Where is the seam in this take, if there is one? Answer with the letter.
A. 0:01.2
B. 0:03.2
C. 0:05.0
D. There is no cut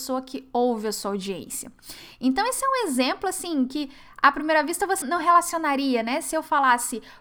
C